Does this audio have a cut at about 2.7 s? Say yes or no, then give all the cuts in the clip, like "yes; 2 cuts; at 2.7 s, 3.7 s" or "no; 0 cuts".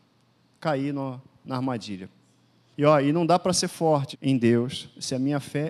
yes; 2 cuts; at 2.7 s, 4.1 s